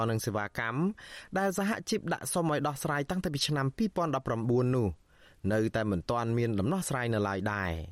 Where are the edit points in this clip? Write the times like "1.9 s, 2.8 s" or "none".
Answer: none